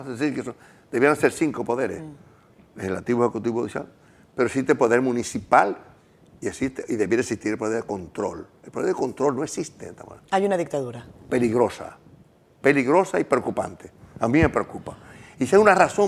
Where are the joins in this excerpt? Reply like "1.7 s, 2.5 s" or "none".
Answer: 10.2 s